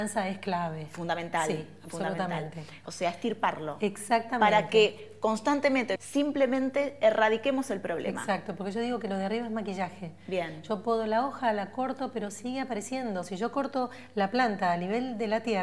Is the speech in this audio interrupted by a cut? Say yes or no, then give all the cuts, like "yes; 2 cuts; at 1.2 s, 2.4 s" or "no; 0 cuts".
yes; 2 cuts; at 2.8 s, 6.0 s